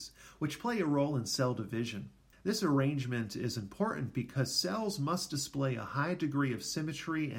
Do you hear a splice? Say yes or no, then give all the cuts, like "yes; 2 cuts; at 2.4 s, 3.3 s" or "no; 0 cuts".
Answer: yes; 1 cut; at 2.3 s